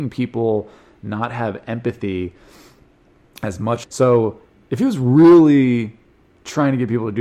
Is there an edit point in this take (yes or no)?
yes